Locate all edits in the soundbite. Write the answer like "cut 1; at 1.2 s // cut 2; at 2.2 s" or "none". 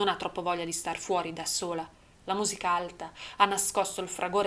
cut 1; at 2.1 s